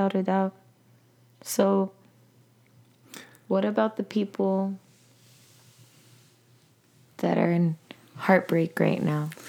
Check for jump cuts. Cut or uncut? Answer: uncut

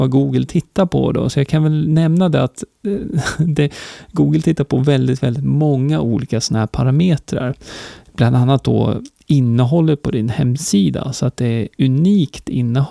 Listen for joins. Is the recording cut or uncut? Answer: uncut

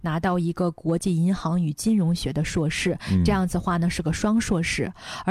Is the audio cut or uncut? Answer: uncut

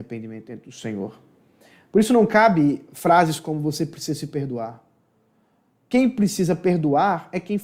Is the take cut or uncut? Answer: uncut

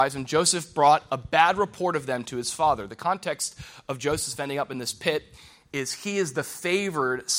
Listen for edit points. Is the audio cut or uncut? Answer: uncut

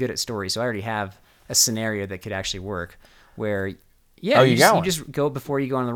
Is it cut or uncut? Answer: uncut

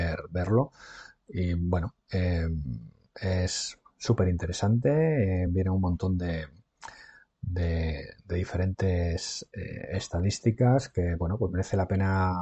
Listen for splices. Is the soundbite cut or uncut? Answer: uncut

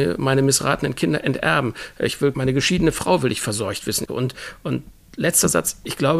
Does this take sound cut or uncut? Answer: cut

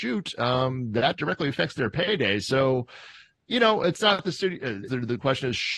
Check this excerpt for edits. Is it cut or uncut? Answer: cut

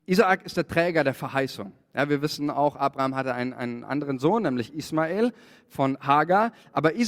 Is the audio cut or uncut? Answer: uncut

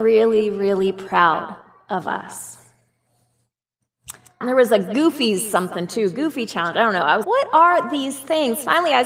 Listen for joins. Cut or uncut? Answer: cut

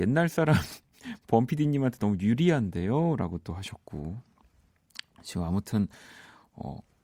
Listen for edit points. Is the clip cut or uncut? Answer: uncut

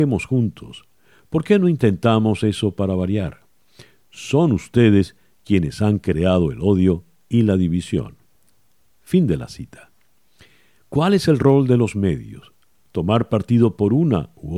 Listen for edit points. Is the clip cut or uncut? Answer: uncut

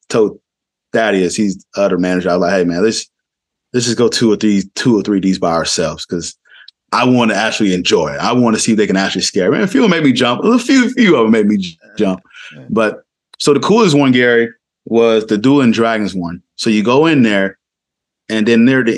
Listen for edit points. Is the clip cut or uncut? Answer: uncut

